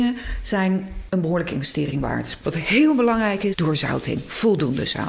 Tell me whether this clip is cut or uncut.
cut